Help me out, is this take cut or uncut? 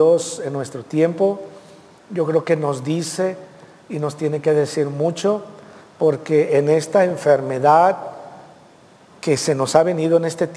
uncut